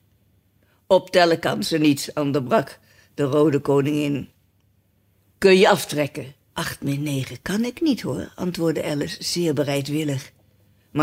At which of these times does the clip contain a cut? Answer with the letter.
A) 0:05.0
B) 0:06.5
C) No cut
B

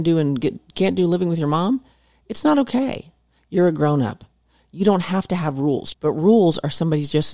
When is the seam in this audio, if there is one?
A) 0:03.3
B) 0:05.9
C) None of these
B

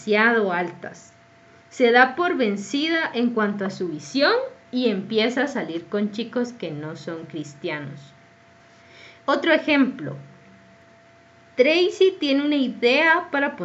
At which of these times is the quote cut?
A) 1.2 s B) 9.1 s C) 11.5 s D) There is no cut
D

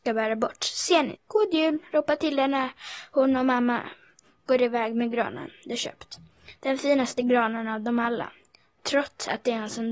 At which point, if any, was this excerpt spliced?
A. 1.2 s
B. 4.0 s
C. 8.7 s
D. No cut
A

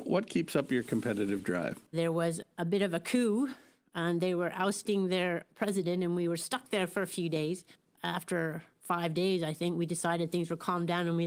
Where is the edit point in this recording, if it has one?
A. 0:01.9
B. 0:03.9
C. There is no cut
A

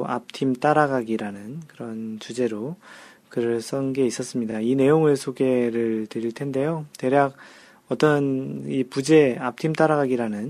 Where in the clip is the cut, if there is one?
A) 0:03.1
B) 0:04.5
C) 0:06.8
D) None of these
D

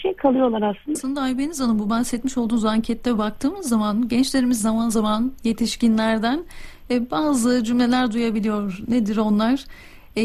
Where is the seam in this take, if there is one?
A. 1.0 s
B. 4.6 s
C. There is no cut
A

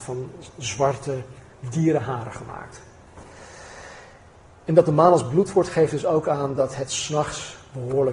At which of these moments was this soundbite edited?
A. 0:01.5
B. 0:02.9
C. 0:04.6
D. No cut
A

